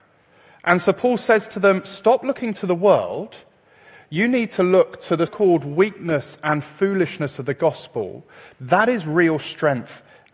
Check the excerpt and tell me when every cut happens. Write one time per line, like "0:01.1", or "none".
0:05.3
0:08.5

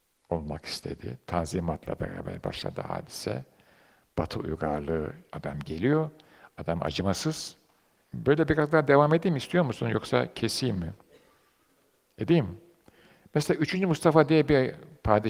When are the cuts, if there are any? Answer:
0:05.3
0:08.0

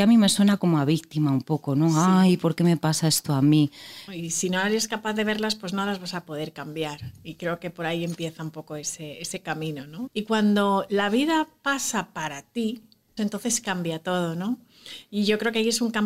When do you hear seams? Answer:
0:04.1
0:10.1
0:13.2

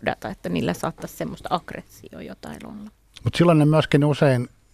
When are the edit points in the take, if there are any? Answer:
0:03.2

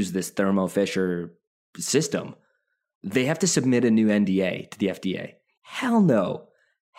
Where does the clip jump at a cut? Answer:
0:05.6

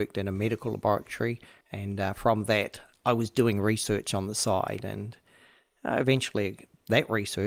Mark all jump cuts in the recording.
0:01.6

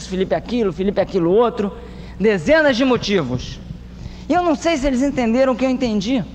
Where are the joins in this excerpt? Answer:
none

